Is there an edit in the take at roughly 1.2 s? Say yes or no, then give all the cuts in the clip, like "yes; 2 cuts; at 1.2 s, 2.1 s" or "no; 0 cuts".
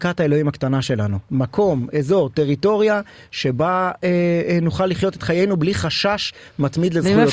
no; 0 cuts